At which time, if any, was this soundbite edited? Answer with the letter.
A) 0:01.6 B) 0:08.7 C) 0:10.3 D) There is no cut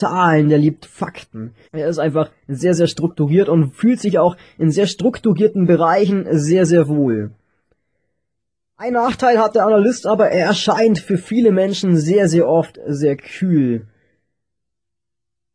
A